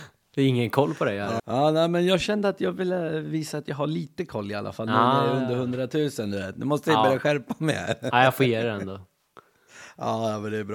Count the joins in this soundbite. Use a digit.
1